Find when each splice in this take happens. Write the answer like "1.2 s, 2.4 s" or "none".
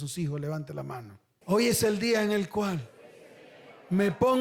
1.4 s